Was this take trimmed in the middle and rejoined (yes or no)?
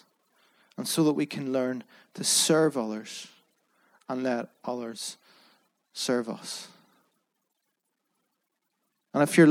no